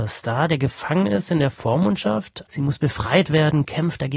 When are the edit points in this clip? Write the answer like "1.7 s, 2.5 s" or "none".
2.4 s